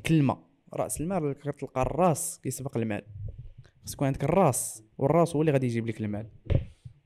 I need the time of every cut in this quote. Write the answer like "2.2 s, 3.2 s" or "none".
4.9 s